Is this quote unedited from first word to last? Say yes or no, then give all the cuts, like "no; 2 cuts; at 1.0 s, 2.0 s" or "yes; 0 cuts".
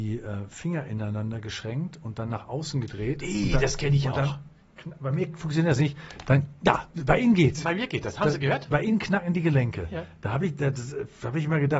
yes; 0 cuts